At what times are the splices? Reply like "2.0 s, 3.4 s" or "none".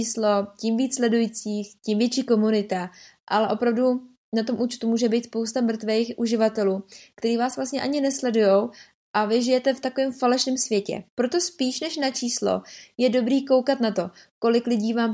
11.1 s